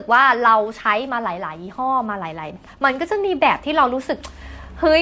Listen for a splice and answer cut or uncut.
cut